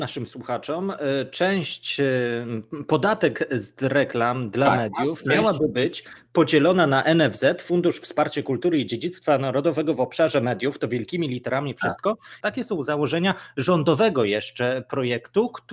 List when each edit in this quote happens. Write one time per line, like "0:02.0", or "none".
0:12.4